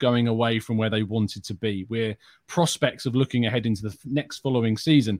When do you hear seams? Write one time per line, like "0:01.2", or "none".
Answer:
none